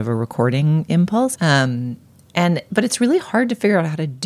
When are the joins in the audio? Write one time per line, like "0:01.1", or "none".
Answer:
0:01.4